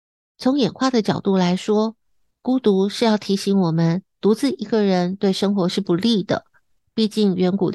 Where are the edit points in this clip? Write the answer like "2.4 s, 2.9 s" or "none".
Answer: none